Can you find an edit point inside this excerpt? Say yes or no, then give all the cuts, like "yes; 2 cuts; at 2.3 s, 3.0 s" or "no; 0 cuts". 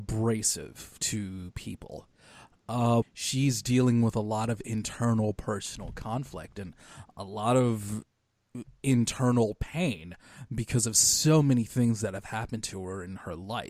yes; 1 cut; at 3.0 s